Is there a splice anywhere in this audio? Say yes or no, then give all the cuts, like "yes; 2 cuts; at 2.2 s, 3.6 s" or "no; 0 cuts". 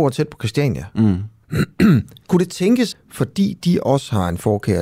yes; 2 cuts; at 1.4 s, 2.9 s